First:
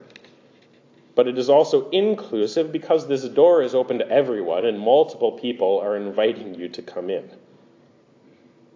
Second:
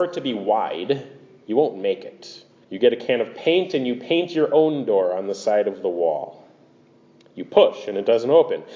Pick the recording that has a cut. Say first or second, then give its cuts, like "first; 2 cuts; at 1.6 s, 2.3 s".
second; 1 cut; at 2.6 s